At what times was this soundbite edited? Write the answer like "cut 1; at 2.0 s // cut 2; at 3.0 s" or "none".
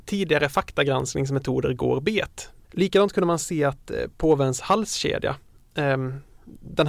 cut 1; at 2.6 s